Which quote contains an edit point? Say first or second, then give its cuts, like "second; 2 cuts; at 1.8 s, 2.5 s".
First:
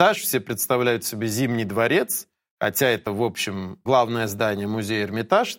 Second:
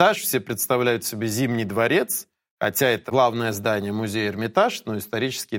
second; 1 cut; at 3.1 s